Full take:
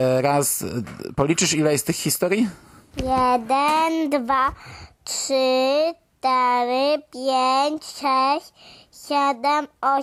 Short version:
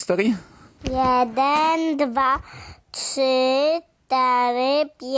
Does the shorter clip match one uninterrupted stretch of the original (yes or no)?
yes